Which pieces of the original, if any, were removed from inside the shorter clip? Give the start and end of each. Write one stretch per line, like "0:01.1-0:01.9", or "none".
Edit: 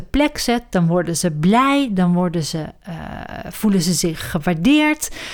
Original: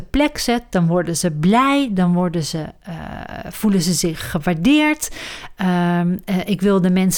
none